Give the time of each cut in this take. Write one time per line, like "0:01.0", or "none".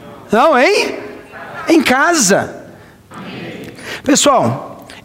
0:03.1

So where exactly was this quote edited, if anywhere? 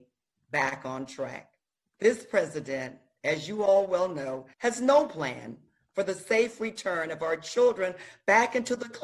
0:01.9
0:04.5

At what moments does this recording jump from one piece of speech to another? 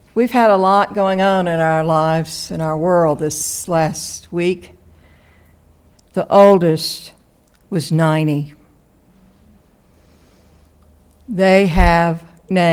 0:05.9

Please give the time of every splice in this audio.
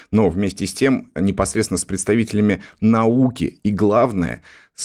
none

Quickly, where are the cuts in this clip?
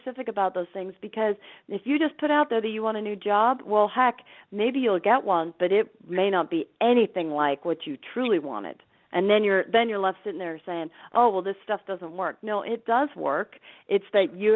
none

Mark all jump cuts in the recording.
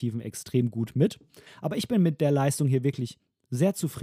0:01.5

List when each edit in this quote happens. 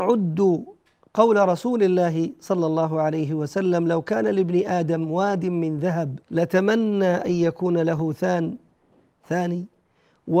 0:06.2

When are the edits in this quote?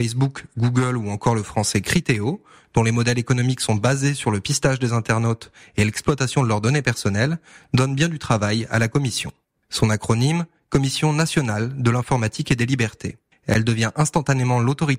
0:09.5

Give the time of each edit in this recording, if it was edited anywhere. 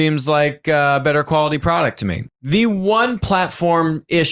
0:02.3

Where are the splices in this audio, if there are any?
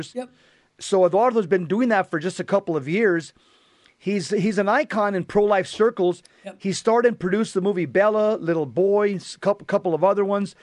none

